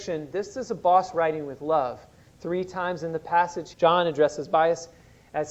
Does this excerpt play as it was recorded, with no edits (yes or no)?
no